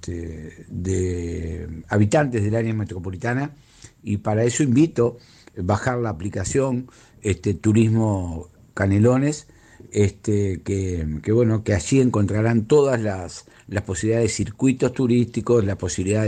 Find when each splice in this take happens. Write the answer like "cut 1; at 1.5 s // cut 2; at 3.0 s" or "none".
cut 1; at 4.0 s